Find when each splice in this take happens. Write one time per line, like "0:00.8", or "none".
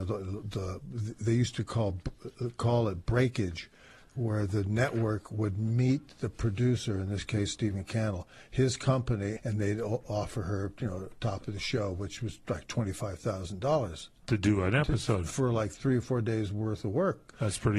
0:09.4